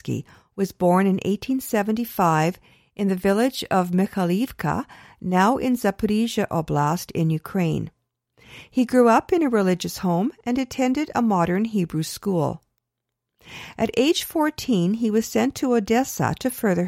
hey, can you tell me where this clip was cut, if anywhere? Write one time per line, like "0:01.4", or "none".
none